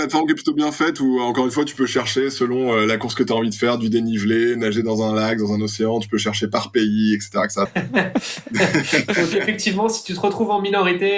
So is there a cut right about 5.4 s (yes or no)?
no